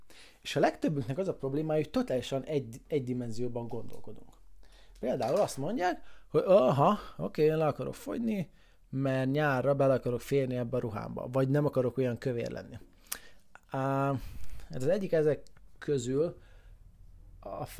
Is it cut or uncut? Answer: uncut